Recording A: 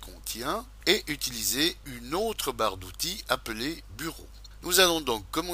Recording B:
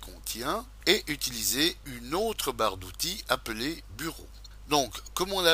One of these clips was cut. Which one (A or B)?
B